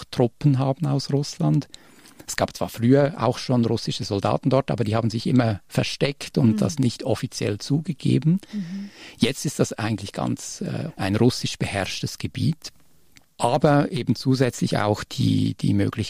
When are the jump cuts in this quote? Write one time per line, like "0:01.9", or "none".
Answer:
0:10.9